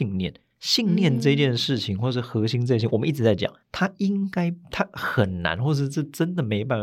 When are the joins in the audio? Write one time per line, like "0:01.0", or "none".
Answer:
0:03.6